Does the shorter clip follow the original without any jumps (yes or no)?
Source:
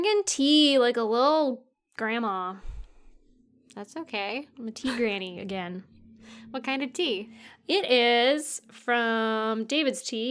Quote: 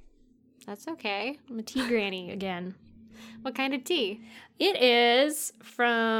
yes